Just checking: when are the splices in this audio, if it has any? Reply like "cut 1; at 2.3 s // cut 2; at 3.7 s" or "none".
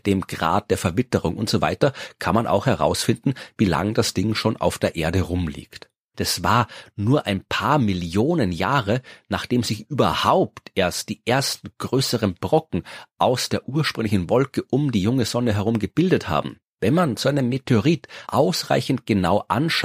cut 1; at 6.1 s // cut 2; at 16.6 s // cut 3; at 18.3 s